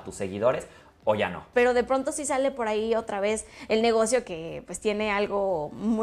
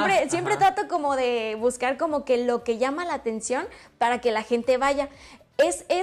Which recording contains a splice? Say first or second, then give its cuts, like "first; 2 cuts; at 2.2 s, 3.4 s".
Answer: first; 2 cuts; at 1.5 s, 4.2 s